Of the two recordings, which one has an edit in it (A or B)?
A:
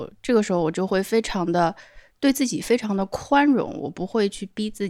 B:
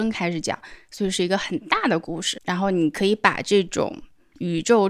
B